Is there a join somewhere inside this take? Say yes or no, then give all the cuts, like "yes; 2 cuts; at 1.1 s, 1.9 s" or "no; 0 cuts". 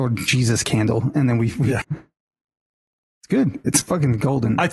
yes; 1 cut; at 1.8 s